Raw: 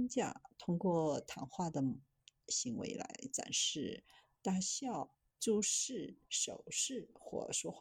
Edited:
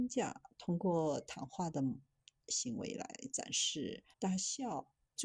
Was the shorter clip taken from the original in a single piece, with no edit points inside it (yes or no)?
no